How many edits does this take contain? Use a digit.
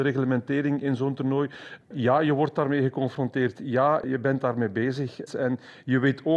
2